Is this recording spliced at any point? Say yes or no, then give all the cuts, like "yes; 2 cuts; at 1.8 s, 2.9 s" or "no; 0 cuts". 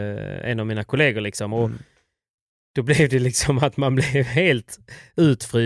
no; 0 cuts